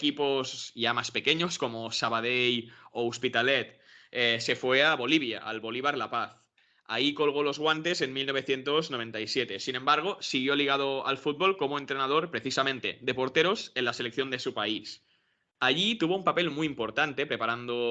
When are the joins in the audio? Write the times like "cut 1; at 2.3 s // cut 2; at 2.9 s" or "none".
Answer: none